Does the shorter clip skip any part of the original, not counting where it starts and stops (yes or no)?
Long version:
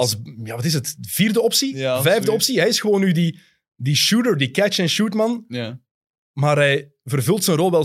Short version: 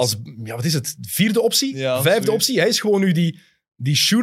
no